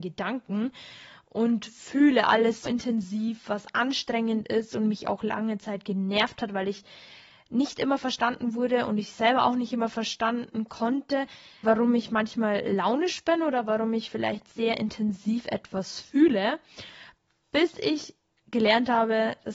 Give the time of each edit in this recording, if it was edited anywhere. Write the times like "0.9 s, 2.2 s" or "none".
2.6 s, 11.6 s